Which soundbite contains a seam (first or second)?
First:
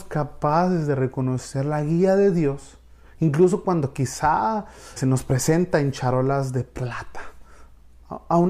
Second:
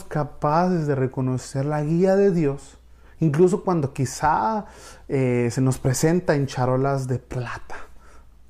first